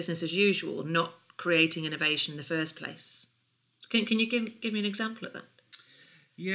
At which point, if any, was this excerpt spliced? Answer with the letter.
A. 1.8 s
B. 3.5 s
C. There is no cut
C